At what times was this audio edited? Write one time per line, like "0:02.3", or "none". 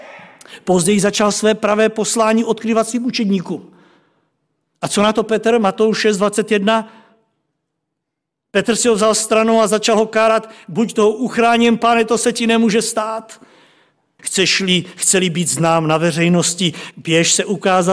0:14.2
0:16.9